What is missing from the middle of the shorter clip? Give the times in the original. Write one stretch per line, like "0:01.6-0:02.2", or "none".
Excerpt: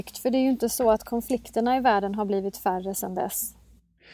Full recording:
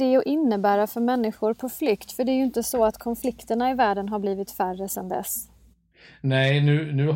none